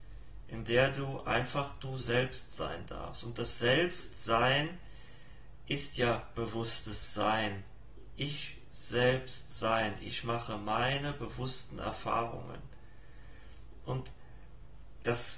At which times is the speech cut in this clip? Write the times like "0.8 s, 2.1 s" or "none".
none